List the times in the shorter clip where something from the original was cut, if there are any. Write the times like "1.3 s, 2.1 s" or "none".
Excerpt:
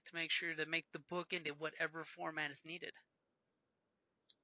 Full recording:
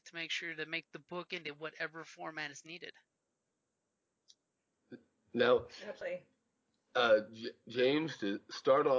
none